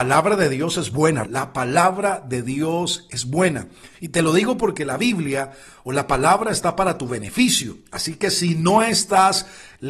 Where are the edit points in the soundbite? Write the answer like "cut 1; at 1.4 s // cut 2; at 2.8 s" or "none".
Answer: cut 1; at 1.2 s